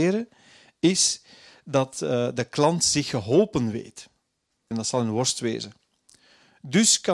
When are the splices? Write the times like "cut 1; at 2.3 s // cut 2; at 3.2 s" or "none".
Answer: cut 1; at 4.7 s